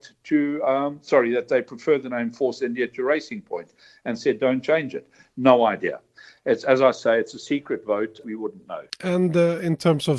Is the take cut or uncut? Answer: cut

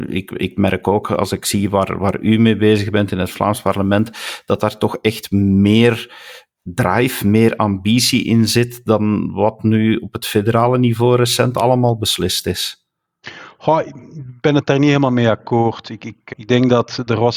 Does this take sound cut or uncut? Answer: cut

